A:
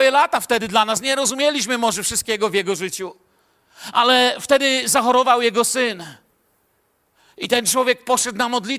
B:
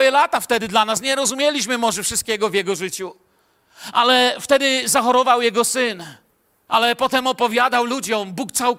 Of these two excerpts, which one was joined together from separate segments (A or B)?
B